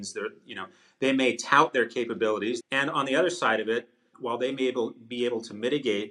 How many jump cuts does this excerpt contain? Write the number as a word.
two